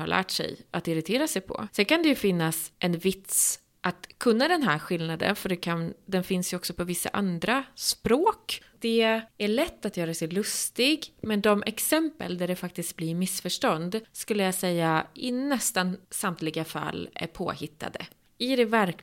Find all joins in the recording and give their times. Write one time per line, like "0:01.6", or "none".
0:08.7